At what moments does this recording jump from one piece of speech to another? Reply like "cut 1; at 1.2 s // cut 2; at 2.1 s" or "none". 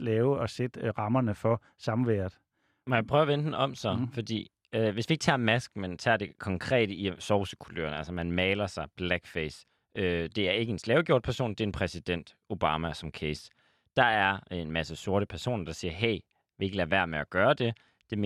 none